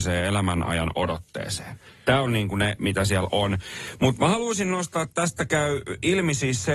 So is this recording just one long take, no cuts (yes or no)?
yes